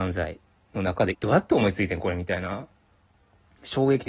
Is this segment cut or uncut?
cut